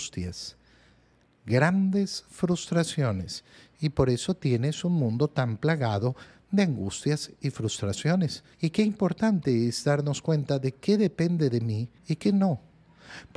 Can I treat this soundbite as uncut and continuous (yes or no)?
no